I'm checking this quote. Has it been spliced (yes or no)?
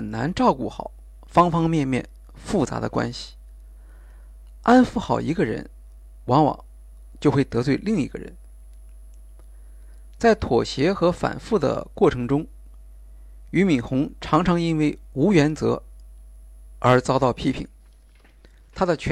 no